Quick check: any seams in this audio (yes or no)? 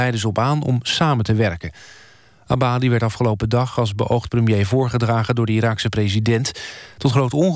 no